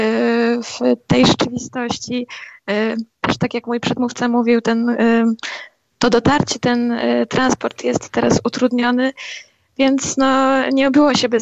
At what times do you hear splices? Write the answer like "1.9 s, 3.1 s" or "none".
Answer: 3.1 s